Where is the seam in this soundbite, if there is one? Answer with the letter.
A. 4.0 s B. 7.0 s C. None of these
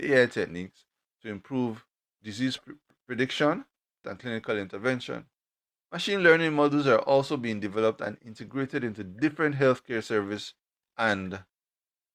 A